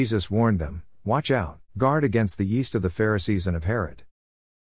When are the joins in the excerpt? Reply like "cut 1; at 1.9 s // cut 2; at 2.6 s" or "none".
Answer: cut 1; at 1.7 s

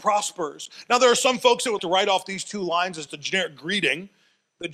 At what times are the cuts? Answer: cut 1; at 1.8 s // cut 2; at 3.1 s

